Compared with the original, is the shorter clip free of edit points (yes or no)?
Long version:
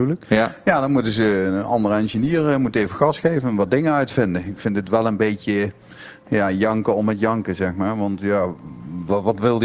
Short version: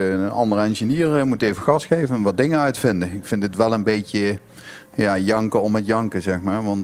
yes